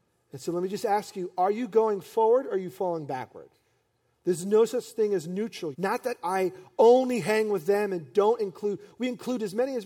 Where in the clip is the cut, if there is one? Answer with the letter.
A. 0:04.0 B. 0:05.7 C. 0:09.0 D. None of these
B